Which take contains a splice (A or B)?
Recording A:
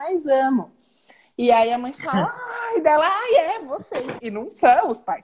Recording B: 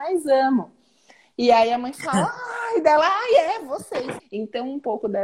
B